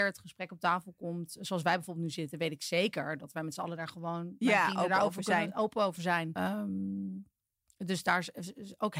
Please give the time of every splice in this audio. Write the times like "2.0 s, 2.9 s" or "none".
6.4 s